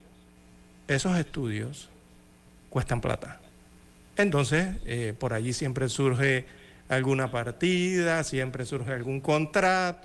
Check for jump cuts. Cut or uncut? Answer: uncut